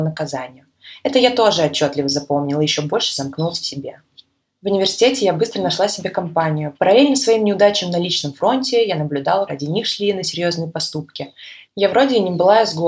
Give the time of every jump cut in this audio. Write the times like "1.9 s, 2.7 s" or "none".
6.7 s, 9.5 s, 11.7 s